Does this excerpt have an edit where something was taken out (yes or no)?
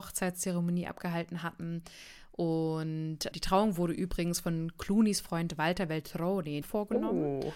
yes